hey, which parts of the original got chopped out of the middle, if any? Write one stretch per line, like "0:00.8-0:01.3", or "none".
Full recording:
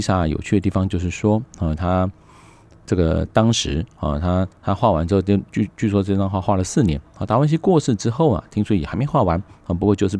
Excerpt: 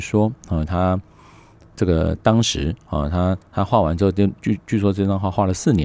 none